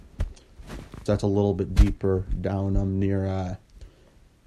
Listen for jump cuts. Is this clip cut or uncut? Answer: cut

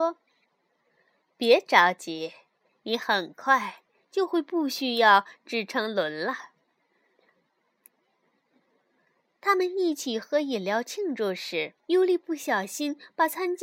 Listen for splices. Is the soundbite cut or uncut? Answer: cut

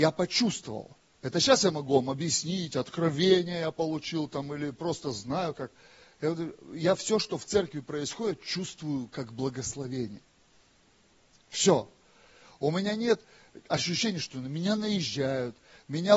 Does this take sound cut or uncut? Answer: uncut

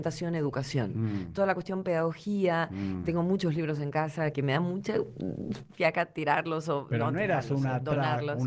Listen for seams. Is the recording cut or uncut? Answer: cut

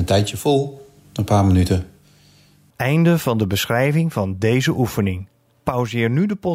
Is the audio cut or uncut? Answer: uncut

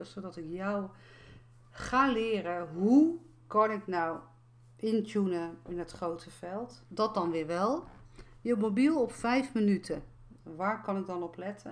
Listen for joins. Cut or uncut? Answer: cut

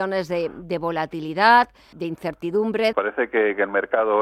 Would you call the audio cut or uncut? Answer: cut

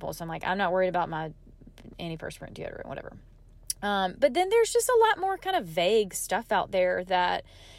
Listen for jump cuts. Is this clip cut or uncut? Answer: uncut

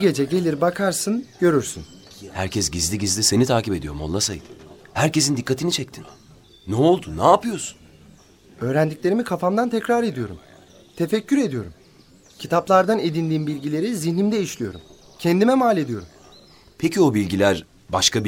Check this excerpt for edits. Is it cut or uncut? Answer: uncut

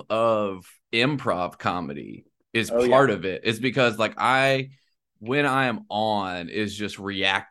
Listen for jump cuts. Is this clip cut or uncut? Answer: uncut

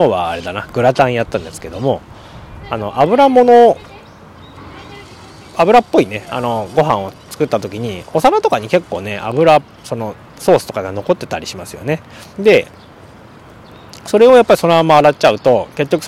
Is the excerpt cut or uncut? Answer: cut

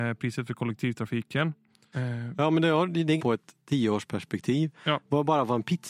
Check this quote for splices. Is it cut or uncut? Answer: cut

